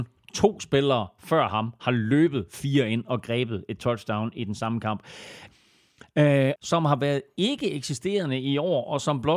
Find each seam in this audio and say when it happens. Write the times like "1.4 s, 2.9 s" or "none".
5.5 s, 6.6 s